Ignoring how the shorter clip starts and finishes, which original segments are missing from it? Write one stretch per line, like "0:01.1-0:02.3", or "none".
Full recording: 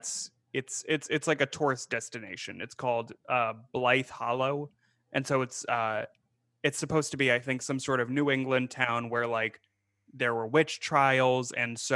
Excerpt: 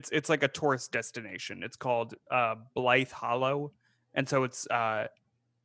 none